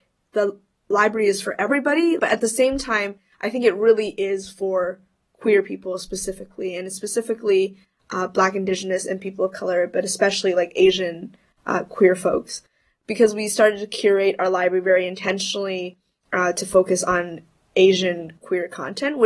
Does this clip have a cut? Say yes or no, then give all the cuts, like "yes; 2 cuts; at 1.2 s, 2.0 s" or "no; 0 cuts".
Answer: yes; 1 cut; at 2.2 s